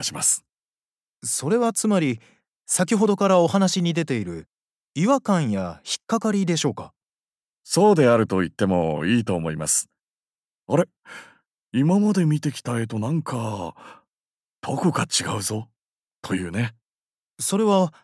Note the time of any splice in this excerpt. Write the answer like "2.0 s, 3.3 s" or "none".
none